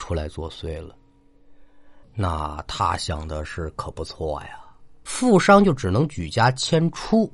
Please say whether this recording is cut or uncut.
cut